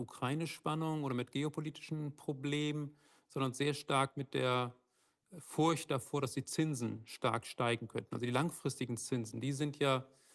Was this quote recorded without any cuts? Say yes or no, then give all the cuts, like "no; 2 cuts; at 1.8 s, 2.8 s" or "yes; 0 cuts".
yes; 0 cuts